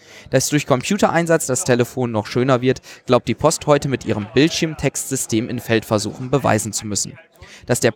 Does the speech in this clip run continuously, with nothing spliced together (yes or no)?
yes